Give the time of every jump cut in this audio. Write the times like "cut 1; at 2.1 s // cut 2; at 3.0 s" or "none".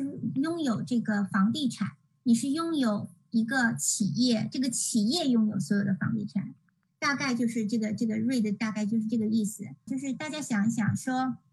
cut 1; at 6.9 s // cut 2; at 9.9 s